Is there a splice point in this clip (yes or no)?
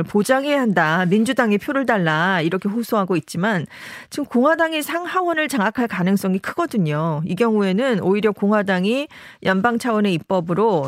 no